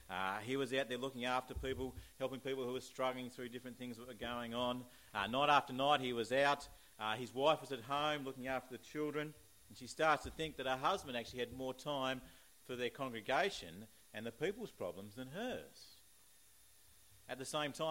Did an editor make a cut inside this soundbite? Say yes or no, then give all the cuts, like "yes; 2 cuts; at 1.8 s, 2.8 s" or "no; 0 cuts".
no; 0 cuts